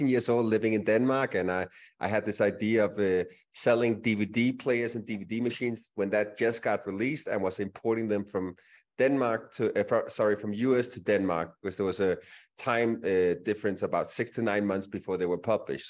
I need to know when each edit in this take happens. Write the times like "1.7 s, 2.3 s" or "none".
none